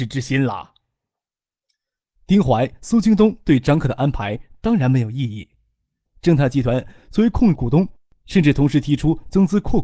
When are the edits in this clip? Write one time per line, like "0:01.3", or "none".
0:06.1
0:07.5